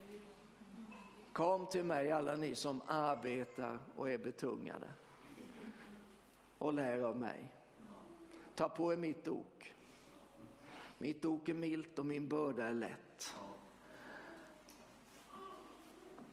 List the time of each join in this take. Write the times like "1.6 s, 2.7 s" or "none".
none